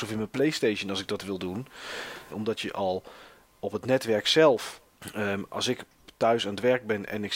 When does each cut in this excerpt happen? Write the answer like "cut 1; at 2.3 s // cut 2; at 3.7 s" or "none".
cut 1; at 2.3 s